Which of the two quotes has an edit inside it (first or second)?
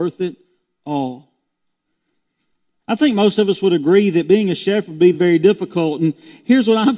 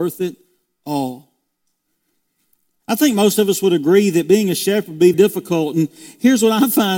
second